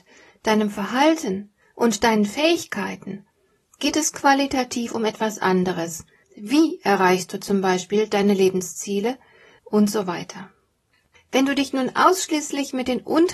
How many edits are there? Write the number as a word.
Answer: two